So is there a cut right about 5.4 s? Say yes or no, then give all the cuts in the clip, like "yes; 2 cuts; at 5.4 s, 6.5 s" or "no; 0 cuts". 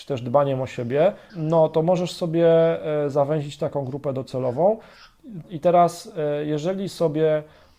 yes; 2 cuts; at 1.3 s, 5.4 s